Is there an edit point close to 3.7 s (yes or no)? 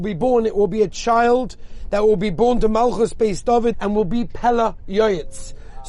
yes